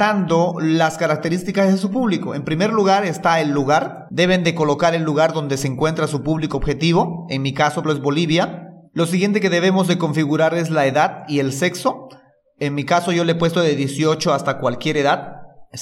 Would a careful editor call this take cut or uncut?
cut